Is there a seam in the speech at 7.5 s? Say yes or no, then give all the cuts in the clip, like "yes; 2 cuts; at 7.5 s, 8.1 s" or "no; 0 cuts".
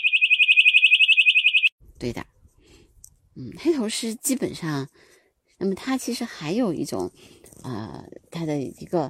no; 1 cut; at 5.6 s